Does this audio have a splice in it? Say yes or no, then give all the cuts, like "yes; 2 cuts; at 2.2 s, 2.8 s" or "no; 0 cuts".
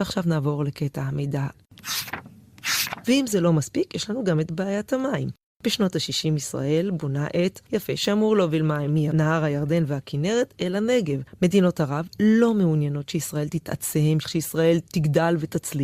yes; 3 cuts; at 3.0 s, 7.7 s, 14.2 s